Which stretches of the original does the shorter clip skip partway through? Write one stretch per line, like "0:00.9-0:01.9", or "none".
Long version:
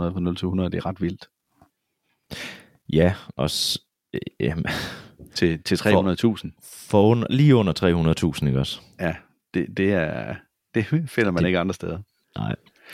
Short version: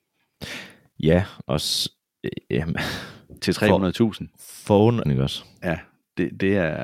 0:05.3-0:05.6
0:07.3-0:08.4